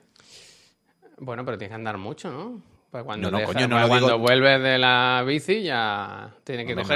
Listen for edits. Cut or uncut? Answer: uncut